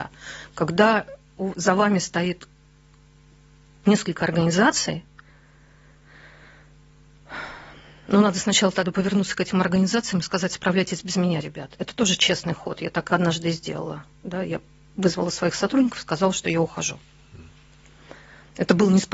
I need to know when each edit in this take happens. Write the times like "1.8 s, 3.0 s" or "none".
none